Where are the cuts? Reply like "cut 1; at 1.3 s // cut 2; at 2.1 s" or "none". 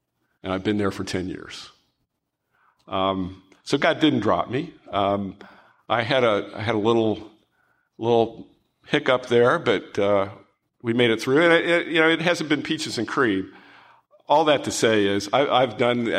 none